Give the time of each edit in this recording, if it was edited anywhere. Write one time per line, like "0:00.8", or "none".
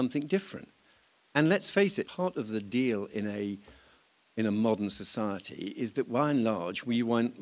0:02.0